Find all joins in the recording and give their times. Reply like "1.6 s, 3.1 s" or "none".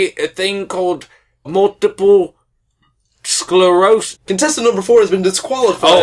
1.4 s, 4.1 s